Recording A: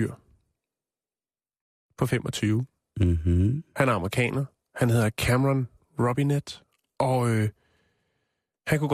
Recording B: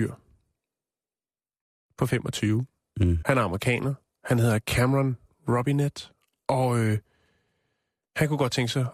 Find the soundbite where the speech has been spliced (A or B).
B